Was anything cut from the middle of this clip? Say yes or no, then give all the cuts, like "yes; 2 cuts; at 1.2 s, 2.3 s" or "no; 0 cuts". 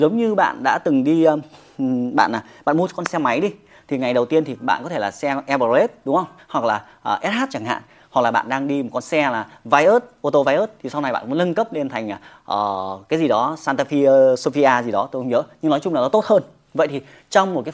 yes; 1 cut; at 6.4 s